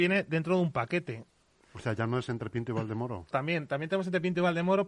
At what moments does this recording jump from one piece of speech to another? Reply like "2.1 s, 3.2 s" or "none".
1.6 s, 3.3 s